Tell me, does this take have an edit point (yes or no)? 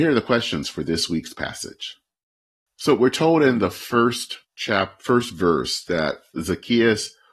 yes